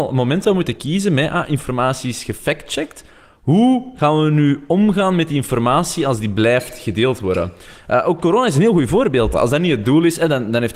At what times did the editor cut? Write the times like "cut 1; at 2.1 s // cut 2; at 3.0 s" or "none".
cut 1; at 9.3 s

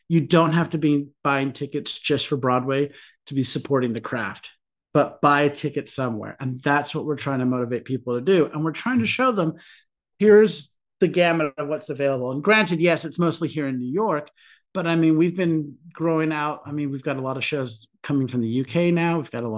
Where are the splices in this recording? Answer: cut 1; at 4.9 s

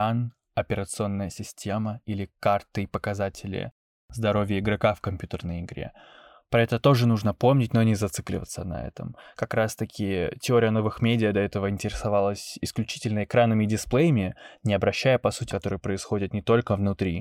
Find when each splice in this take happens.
cut 1; at 15.5 s

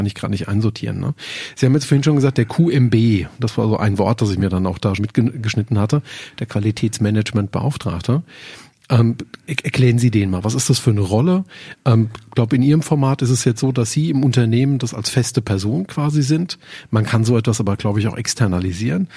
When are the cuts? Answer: cut 1; at 5.0 s

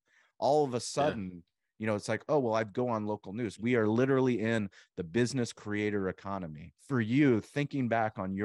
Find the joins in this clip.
cut 1; at 3.6 s // cut 2; at 6.8 s

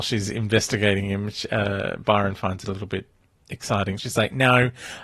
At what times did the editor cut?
cut 1; at 4.0 s

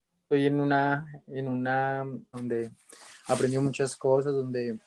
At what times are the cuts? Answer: cut 1; at 2.3 s

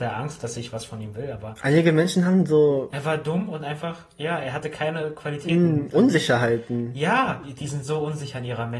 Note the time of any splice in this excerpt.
cut 1; at 7.4 s

